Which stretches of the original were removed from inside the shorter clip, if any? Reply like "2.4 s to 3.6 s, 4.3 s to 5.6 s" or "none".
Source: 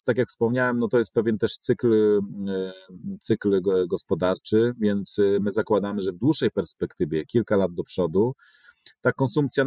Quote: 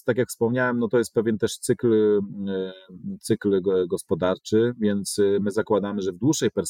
none